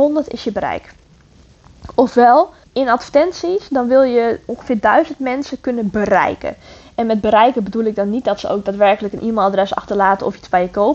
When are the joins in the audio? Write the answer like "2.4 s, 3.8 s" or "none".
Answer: 2.6 s